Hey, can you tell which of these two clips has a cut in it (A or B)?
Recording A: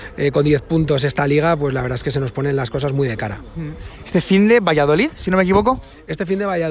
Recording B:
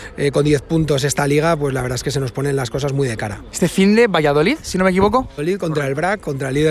B